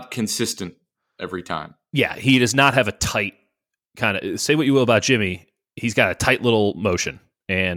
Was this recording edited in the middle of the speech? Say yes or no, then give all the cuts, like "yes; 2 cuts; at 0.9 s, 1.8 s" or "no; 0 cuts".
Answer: no; 0 cuts